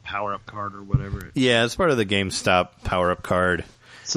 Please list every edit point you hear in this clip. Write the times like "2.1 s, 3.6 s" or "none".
none